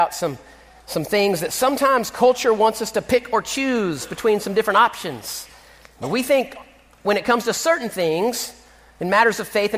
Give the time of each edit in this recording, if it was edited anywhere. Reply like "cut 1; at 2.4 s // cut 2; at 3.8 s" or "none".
none